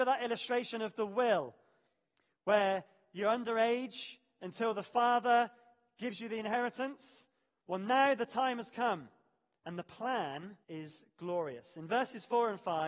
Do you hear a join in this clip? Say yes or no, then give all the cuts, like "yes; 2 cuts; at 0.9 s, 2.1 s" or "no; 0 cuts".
yes; 2 cuts; at 9.6 s, 10.6 s